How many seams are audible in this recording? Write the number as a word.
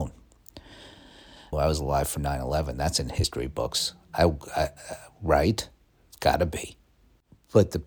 one